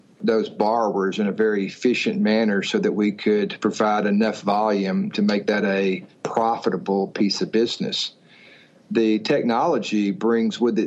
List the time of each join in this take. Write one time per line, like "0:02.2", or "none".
none

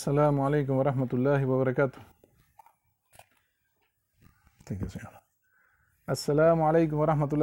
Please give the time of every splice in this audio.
none

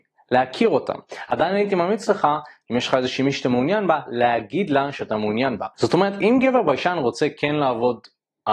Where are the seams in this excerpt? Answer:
0:05.7

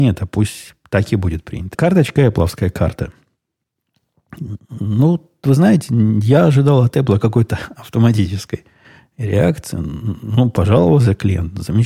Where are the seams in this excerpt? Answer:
0:01.7

